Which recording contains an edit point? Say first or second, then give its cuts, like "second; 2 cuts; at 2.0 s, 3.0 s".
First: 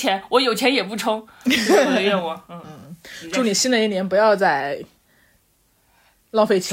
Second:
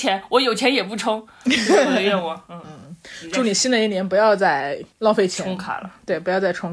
second; 1 cut; at 4.9 s